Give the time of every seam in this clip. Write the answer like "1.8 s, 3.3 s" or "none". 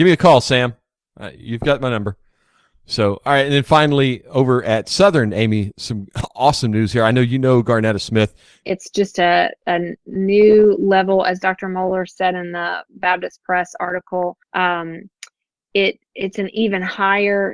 8.6 s, 14.4 s